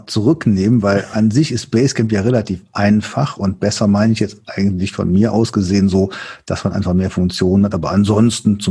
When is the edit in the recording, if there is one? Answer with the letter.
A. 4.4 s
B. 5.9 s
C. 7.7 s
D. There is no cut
C